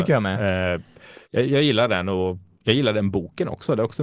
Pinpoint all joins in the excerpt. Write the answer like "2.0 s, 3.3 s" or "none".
1.2 s